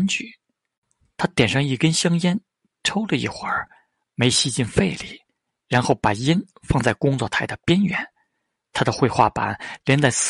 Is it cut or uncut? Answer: uncut